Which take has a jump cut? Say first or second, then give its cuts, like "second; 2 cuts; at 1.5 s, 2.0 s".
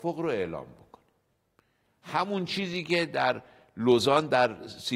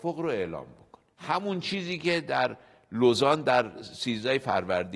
second; 1 cut; at 1.1 s